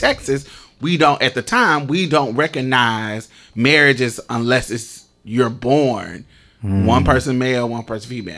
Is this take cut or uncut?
uncut